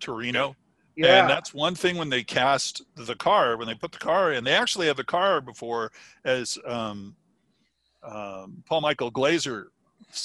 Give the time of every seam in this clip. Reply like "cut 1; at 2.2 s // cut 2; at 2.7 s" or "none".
none